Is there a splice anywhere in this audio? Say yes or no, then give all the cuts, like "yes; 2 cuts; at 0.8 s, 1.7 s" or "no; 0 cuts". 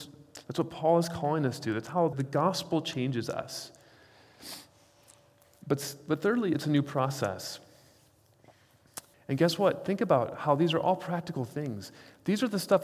yes; 2 cuts; at 2.1 s, 9.1 s